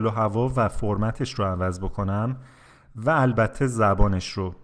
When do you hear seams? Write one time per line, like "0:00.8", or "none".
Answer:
none